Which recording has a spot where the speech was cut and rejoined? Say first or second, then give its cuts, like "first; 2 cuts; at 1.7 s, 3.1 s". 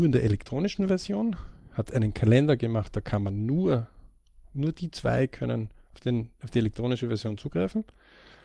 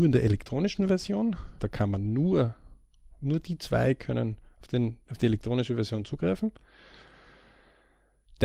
second; 1 cut; at 1.6 s